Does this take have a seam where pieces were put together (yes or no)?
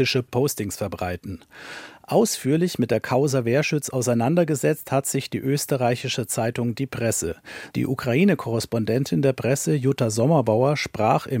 yes